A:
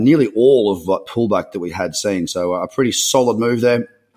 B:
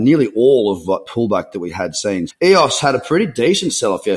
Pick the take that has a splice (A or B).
B